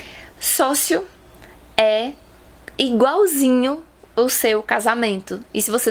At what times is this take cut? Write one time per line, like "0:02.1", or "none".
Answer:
none

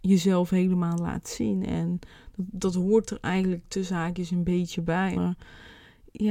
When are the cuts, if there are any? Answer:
0:05.1

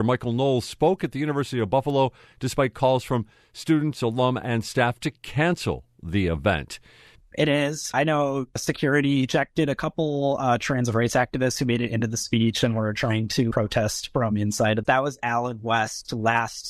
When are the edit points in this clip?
0:07.2
0:14.8

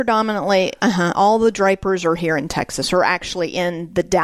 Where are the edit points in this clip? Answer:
none

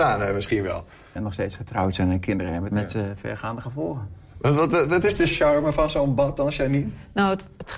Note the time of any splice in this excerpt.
0:01.2
0:02.7

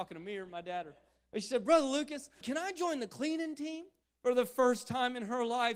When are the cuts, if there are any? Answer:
0:02.4
0:04.0

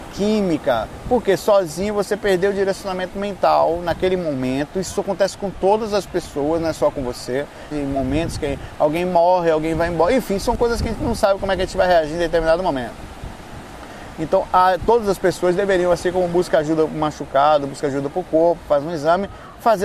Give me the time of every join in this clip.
0:07.7

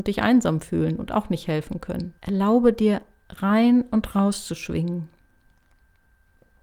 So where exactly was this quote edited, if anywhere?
0:02.2

